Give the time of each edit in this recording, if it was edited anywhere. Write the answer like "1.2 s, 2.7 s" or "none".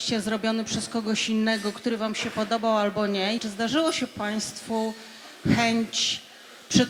3.4 s